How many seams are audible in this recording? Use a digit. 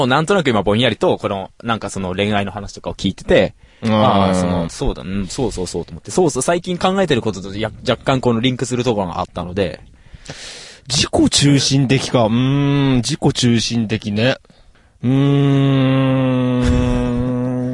1